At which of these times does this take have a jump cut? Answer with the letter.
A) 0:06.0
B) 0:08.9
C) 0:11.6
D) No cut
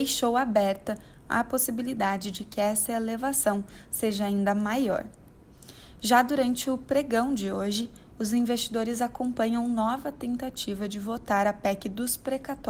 D